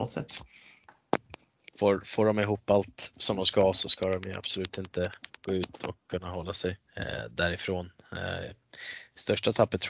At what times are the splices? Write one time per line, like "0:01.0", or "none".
0:01.7
0:06.8